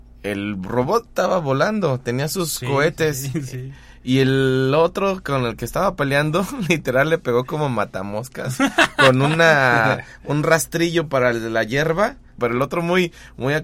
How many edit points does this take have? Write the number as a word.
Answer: one